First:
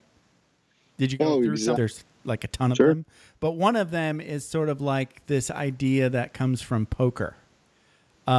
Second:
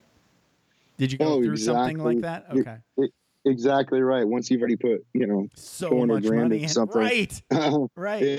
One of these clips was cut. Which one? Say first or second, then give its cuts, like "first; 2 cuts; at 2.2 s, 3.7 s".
first; 1 cut; at 1.7 s